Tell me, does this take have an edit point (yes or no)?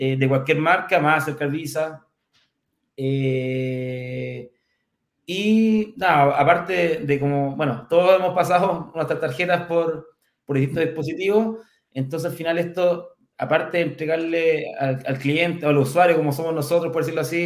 yes